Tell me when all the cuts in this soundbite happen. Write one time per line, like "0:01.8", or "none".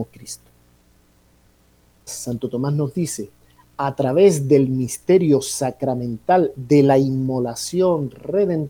0:02.1